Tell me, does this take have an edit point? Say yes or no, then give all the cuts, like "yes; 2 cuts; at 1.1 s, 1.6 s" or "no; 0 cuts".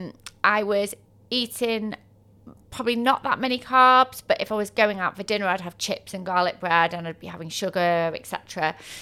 no; 0 cuts